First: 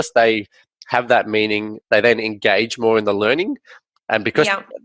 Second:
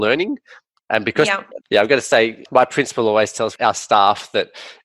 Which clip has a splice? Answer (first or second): second